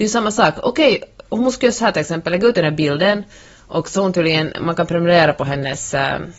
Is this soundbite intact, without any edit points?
yes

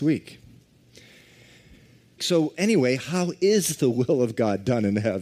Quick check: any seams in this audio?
yes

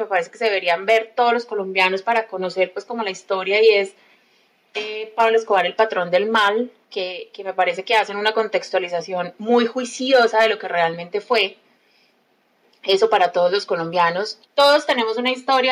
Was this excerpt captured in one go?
no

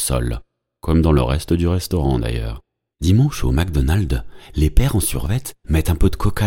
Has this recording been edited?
yes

